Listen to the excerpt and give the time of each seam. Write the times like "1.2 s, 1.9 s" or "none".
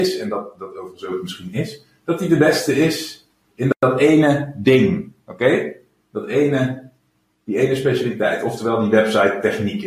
none